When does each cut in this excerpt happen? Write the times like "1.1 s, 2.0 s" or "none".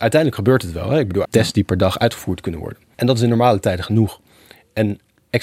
1.2 s, 2.9 s